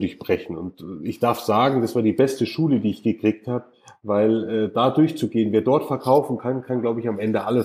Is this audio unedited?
yes; 0 cuts

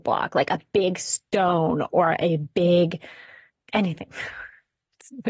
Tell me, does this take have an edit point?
no; 0 cuts

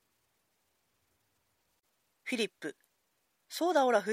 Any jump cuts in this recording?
no; 0 cuts

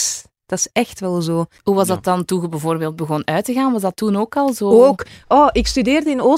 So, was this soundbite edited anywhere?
yes; 1 cut; at 1.6 s

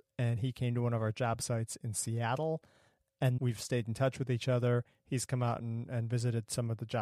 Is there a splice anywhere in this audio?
yes; 1 cut; at 3.4 s

